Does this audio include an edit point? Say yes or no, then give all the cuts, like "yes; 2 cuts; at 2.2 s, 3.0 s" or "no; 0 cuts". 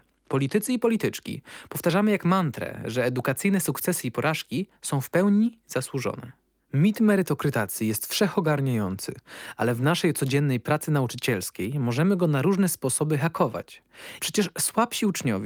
yes; 1 cut; at 14.2 s